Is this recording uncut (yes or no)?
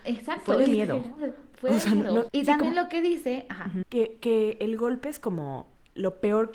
no